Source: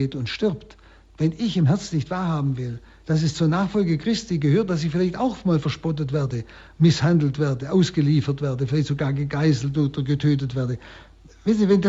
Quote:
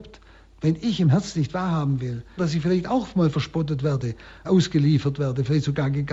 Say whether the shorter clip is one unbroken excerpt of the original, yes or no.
no